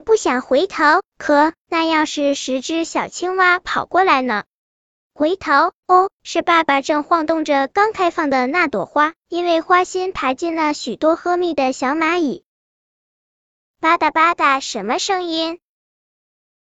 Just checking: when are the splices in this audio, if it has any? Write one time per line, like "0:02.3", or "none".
0:05.0